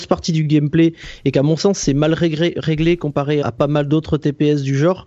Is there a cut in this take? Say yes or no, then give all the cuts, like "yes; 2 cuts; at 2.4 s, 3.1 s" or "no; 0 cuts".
yes; 1 cut; at 3.4 s